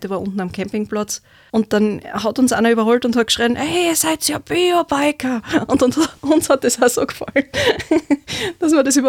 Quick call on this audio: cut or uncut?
cut